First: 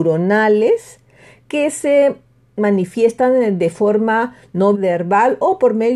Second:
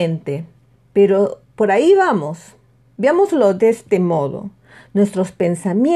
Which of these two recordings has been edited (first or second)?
first